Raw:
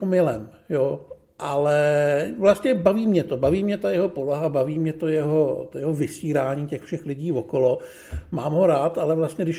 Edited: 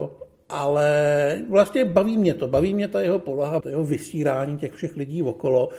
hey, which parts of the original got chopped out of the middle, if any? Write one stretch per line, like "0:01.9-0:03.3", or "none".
0:04.5-0:05.7